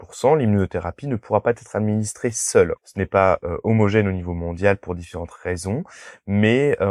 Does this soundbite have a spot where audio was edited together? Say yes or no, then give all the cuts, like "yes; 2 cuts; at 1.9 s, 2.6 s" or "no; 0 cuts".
yes; 1 cut; at 2.8 s